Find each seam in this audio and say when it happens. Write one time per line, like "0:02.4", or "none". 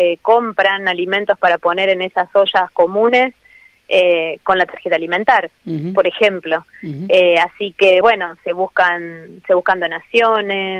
none